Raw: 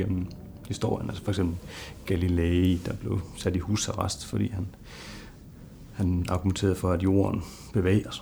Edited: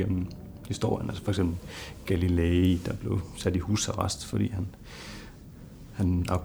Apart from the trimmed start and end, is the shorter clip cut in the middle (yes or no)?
no